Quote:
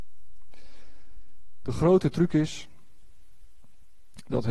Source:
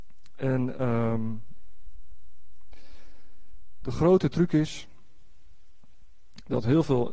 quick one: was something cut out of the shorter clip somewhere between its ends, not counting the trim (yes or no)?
no